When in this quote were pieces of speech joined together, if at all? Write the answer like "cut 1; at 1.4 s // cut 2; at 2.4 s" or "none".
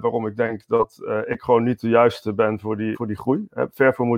cut 1; at 2.9 s